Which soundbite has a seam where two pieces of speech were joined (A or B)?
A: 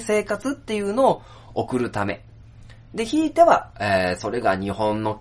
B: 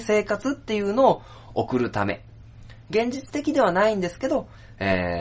B